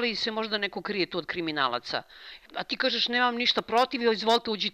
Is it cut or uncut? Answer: uncut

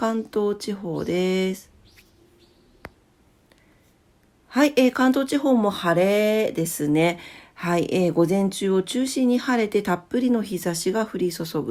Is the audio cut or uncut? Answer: uncut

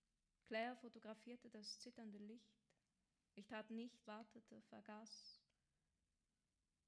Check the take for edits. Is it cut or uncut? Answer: cut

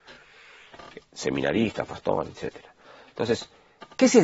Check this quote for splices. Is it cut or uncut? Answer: uncut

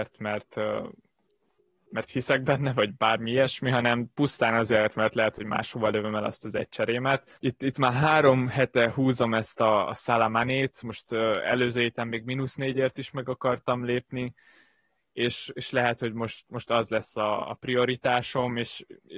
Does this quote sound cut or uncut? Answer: cut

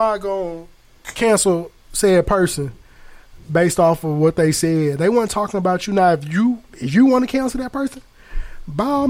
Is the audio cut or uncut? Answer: cut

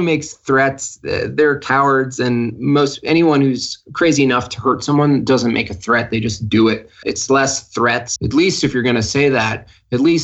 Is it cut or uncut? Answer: cut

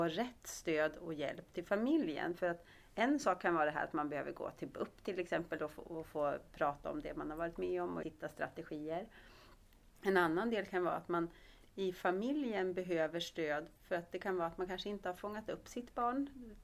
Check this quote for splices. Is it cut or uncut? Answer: cut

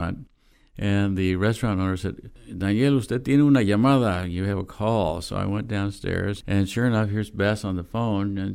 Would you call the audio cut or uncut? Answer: uncut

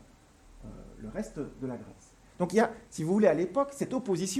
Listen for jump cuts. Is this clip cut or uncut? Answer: uncut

